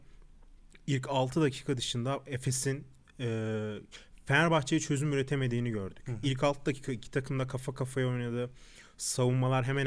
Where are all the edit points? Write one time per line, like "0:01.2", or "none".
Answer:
none